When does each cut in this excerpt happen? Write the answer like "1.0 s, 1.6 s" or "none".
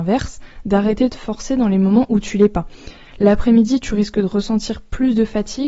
3.1 s